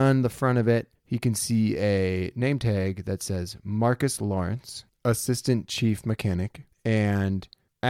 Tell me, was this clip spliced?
no; 0 cuts

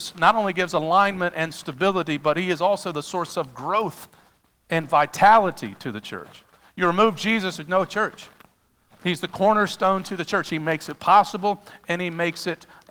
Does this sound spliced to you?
no; 0 cuts

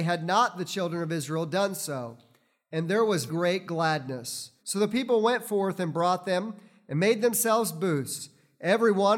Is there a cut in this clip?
yes; 2 cuts; at 3.3 s, 4.6 s

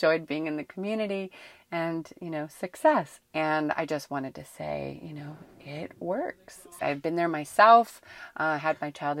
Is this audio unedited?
no; 2 cuts; at 3.2 s, 6.8 s

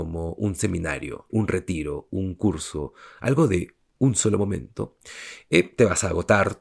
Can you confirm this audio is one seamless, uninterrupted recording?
no; 1 cut; at 1.3 s

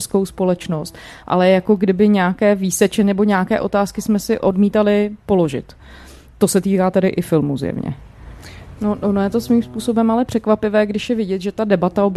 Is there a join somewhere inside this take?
yes; 1 cut; at 8.8 s

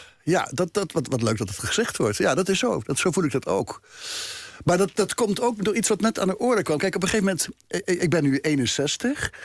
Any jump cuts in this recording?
no; 0 cuts

